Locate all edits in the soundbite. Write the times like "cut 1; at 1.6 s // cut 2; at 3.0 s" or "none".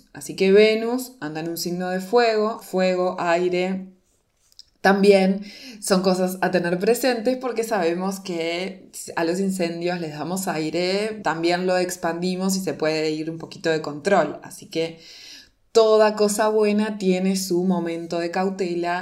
cut 1; at 2.6 s // cut 2; at 11.2 s

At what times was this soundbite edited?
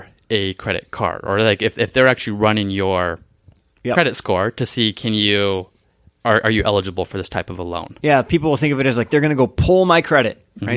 none

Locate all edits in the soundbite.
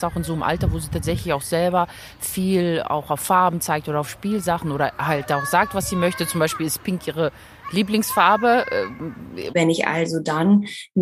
cut 1; at 9.5 s

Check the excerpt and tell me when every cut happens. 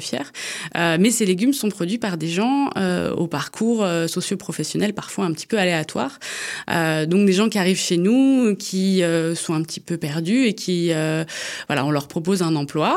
none

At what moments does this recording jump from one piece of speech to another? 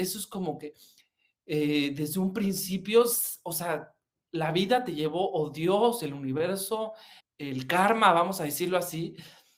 cut 1; at 7.2 s

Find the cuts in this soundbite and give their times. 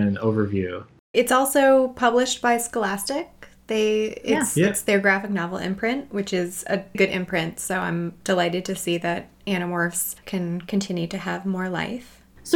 cut 1; at 1.1 s // cut 2; at 6.9 s

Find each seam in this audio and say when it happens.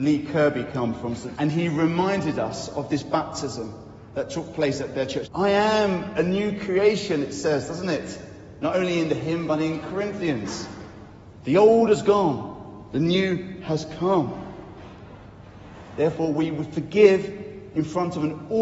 cut 1; at 1.3 s // cut 2; at 5.3 s

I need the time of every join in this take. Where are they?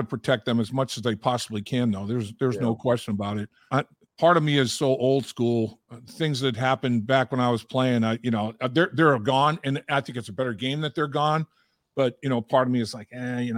cut 1; at 3.7 s

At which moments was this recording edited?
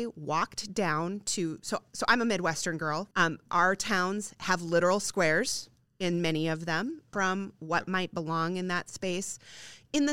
cut 1; at 3.1 s // cut 2; at 7.1 s

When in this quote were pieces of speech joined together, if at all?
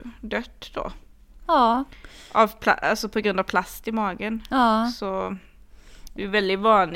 none

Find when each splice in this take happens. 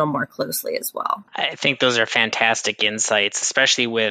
cut 1; at 1.3 s

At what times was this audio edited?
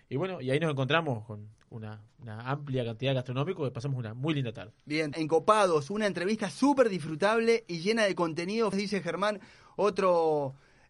cut 1; at 5.1 s // cut 2; at 8.7 s

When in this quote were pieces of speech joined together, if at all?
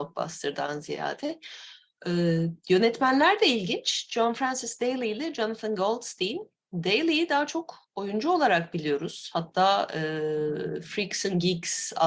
none

